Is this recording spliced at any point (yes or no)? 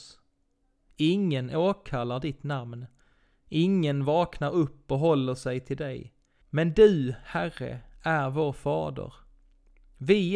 yes